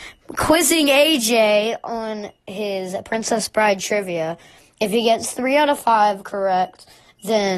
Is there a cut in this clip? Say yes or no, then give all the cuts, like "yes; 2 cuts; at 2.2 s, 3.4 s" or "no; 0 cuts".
no; 0 cuts